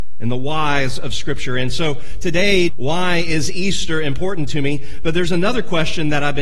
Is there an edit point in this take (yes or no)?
yes